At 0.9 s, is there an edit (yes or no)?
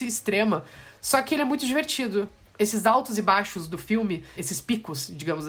no